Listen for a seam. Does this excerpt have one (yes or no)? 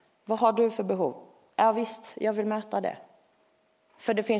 no